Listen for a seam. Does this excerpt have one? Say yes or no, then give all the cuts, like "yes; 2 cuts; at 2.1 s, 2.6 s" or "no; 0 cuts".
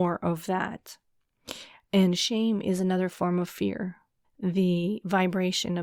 yes; 1 cut; at 4.2 s